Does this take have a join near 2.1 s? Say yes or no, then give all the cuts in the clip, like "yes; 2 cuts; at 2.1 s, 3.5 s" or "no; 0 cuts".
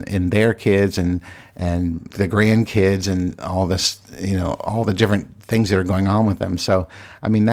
yes; 1 cut; at 2.1 s